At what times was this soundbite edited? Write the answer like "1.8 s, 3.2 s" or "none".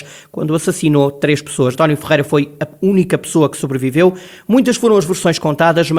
1.7 s